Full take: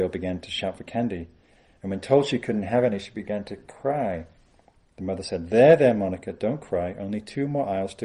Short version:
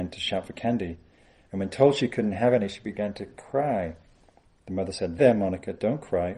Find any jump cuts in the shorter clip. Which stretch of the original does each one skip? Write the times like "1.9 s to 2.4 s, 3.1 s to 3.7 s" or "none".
5.5 s to 5.8 s